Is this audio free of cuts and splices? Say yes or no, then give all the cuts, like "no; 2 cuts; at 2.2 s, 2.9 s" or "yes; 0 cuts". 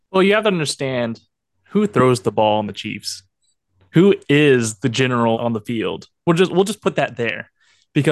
no; 1 cut; at 5.3 s